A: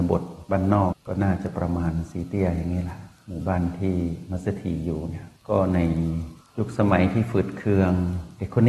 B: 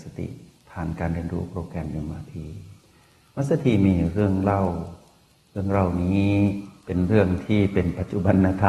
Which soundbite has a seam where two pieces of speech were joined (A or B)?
A